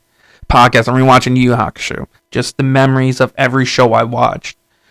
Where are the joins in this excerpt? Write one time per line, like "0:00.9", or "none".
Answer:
0:02.2